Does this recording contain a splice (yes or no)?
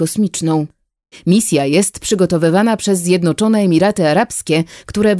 yes